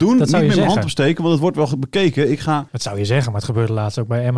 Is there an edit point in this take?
yes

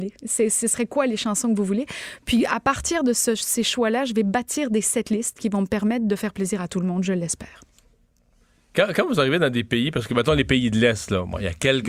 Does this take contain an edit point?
no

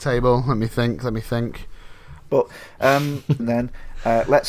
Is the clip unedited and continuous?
no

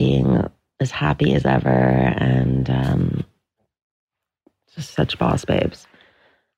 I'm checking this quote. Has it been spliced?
no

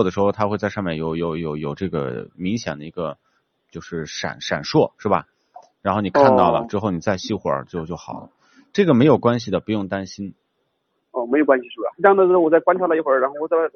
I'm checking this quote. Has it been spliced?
yes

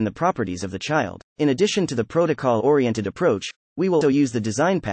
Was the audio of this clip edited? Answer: yes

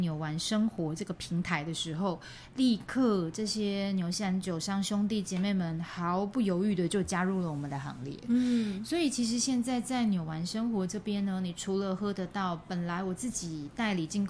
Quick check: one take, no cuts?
yes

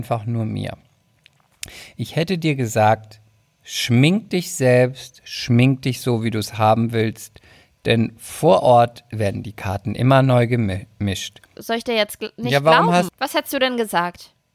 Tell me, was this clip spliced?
yes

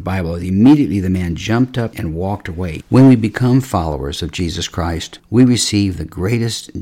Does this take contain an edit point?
yes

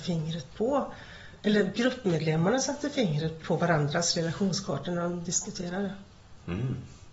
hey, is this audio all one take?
no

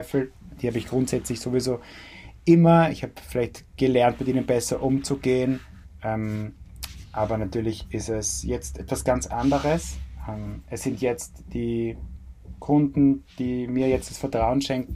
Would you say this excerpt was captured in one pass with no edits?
yes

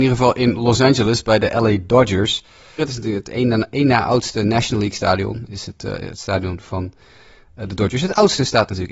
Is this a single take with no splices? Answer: no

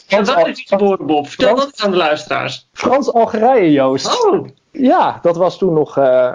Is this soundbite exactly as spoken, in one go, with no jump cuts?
yes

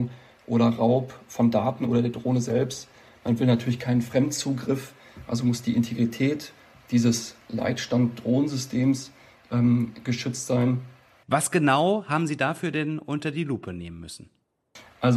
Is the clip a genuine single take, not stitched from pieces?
no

